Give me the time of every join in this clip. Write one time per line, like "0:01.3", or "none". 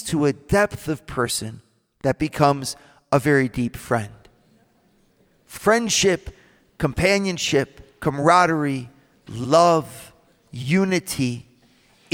none